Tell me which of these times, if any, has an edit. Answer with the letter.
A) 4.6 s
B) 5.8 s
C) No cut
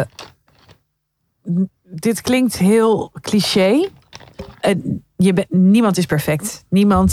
A